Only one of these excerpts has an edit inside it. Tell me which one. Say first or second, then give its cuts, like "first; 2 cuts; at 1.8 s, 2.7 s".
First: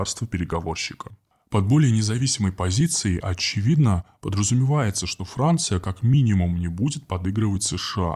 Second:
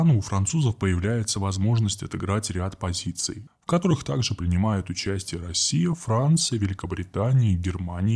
second; 1 cut; at 3.5 s